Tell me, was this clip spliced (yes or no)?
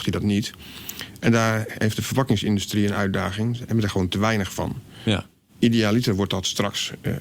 no